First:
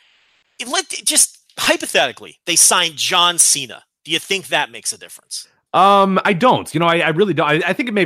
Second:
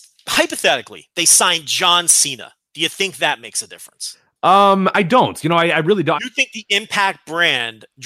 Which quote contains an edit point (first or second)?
second